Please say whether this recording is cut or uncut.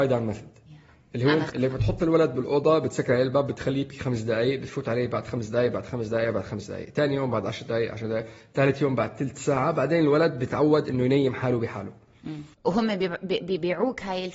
cut